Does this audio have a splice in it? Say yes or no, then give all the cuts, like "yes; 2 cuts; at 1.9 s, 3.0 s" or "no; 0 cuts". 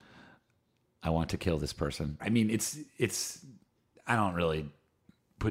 yes; 1 cut; at 2.2 s